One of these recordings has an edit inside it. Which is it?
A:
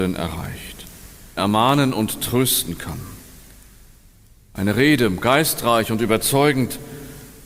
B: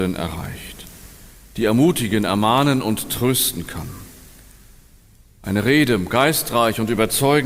A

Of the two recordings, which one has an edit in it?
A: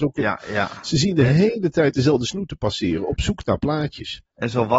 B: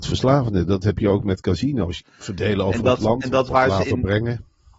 B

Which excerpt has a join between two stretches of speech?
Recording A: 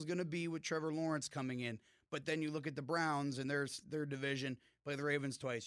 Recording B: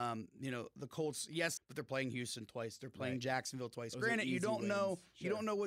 B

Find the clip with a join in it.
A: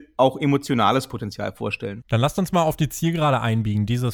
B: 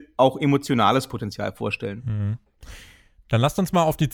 A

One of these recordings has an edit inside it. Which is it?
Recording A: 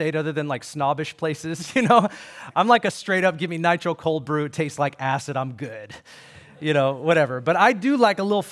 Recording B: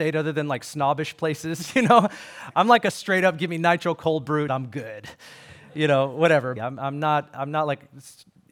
B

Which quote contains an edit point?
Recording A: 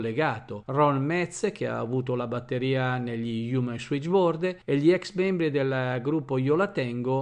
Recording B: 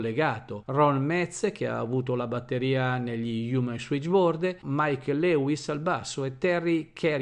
B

